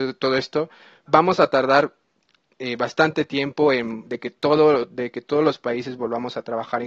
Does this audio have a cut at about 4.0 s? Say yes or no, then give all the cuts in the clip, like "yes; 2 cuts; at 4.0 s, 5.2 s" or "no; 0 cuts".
yes; 2 cuts; at 1.1 s, 4.0 s